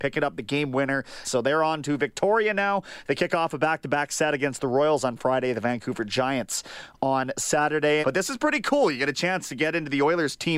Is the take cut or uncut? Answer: cut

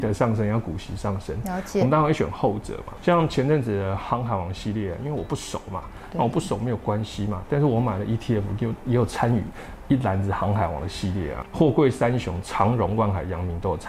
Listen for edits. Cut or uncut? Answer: uncut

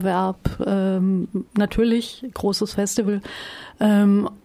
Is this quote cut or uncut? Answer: cut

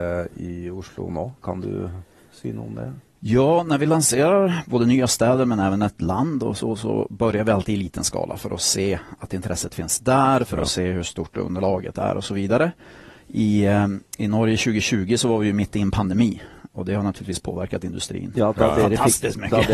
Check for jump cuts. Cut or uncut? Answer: uncut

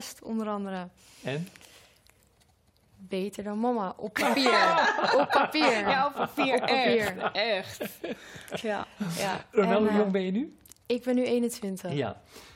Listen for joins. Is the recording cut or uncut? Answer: uncut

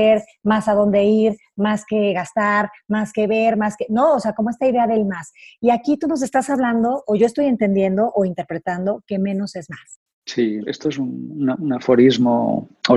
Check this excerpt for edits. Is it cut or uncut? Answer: cut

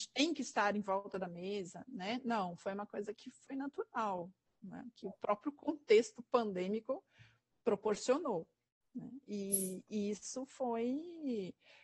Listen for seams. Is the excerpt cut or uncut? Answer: uncut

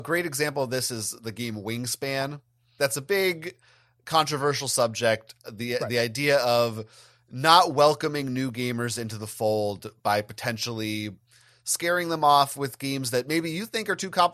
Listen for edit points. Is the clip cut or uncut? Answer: cut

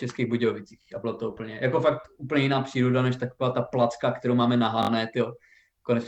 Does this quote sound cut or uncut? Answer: uncut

